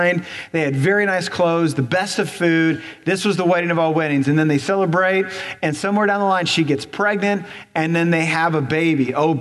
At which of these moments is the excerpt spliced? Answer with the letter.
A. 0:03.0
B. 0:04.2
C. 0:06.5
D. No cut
D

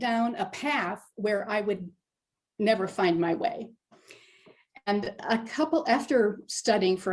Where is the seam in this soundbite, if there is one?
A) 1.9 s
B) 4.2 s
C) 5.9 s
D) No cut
D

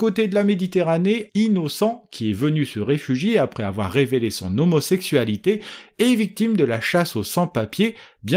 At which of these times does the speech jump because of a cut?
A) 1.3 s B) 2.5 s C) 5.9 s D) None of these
A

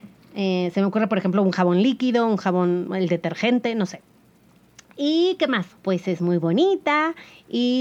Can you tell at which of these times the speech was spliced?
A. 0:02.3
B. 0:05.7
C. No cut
B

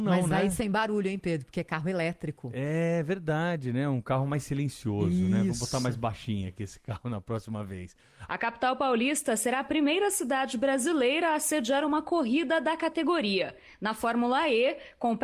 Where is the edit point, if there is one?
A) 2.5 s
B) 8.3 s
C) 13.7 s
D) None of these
B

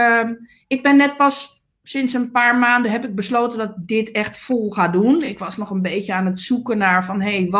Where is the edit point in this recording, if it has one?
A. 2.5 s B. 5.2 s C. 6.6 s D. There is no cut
D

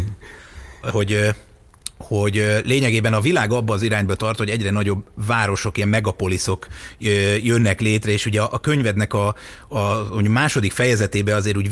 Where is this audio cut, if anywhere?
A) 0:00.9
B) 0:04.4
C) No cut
A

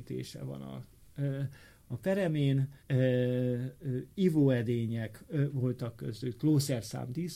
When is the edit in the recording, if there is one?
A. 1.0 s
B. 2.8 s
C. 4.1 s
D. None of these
B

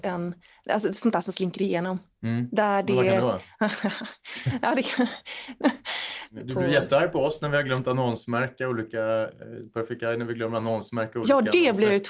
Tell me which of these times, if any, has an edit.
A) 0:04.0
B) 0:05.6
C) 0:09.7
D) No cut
B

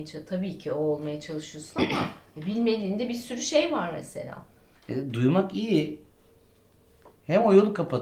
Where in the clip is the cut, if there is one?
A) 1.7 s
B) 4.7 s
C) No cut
B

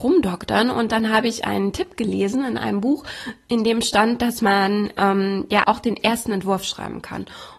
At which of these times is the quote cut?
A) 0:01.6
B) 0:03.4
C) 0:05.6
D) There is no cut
C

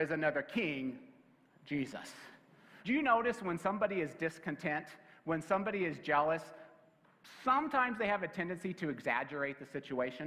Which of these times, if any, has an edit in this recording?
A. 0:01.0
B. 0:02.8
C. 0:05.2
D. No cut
B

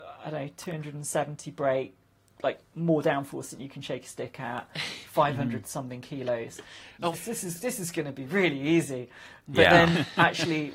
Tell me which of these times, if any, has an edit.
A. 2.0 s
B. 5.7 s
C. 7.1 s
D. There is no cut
C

